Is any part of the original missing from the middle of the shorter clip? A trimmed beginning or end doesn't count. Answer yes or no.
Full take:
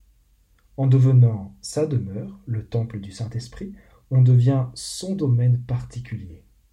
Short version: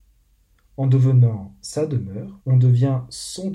yes